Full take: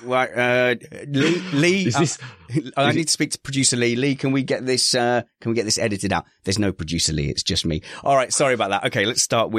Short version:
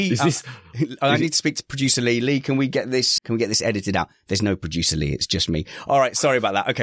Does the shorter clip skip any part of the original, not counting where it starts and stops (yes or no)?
yes